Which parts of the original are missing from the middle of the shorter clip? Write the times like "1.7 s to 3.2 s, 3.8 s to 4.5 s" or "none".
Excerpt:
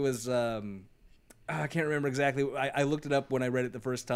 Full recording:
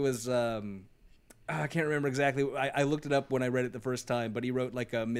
none